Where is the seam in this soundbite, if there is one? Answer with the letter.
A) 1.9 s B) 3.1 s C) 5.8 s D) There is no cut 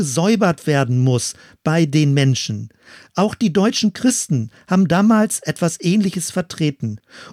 D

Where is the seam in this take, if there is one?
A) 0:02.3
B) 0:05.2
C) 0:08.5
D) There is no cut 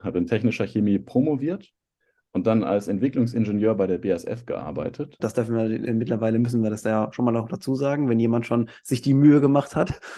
B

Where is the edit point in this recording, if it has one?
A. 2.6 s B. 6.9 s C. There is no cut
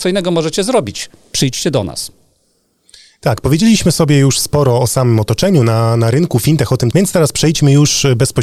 B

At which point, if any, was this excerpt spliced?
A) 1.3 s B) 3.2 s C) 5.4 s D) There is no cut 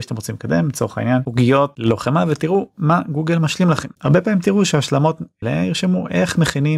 C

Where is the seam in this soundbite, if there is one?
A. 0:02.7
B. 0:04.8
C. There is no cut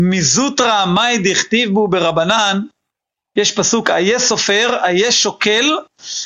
C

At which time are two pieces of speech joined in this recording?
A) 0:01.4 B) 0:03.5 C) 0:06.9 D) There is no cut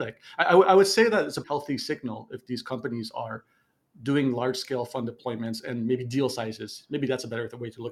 A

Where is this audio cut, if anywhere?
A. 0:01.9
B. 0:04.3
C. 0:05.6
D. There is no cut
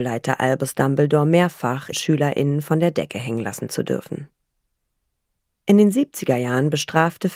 A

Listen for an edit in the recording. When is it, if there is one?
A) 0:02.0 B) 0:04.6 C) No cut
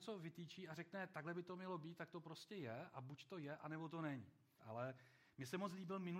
B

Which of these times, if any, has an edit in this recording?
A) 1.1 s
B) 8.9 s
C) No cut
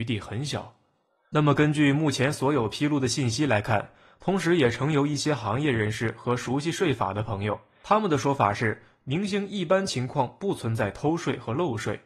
C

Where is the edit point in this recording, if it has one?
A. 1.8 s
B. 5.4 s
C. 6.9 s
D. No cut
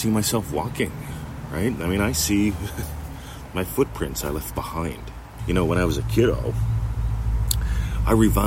B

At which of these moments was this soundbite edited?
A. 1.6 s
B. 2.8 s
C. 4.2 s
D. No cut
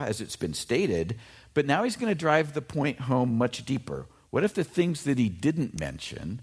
C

